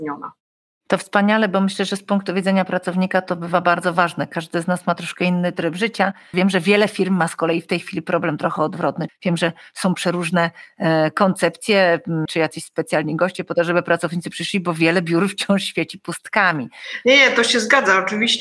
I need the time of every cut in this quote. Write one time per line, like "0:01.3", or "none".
0:06.3
0:09.1
0:12.3